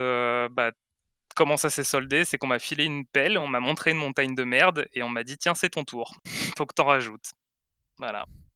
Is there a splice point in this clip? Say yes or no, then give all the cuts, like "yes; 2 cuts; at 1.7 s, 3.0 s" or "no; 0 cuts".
no; 0 cuts